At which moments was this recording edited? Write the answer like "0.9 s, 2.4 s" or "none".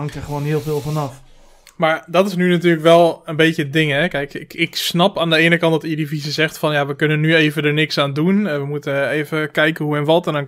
none